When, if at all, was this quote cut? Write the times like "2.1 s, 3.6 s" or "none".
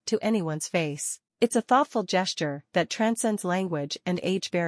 1.3 s